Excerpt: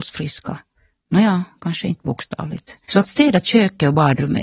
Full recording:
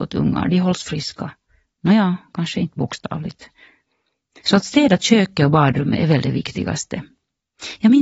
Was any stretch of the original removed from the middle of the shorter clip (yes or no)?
yes